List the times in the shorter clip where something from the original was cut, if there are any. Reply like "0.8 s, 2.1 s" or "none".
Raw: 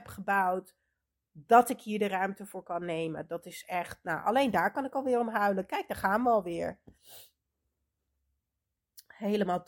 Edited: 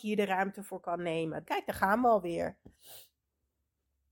1.5 s